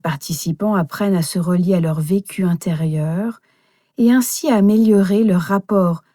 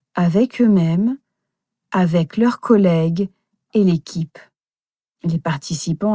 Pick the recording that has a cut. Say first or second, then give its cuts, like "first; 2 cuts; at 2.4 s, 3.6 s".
second; 1 cut; at 5.1 s